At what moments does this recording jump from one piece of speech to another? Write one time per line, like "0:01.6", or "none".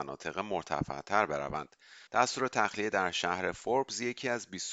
0:02.1